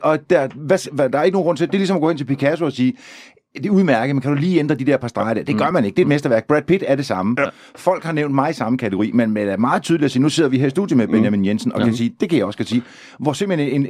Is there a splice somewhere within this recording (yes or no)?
no